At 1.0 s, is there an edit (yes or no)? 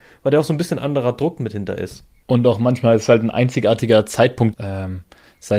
no